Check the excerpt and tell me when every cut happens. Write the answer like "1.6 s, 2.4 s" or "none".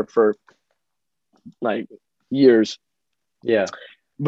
none